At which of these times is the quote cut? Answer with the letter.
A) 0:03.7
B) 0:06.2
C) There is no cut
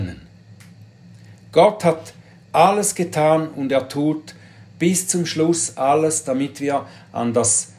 C